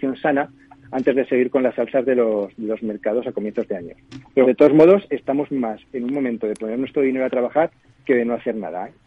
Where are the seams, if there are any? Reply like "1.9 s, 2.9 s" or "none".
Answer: 4.4 s